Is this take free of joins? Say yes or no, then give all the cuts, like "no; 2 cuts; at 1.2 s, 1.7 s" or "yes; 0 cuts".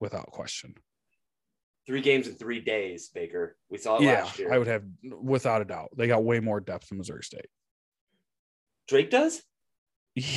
yes; 0 cuts